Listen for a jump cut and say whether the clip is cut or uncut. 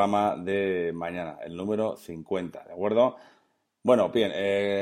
uncut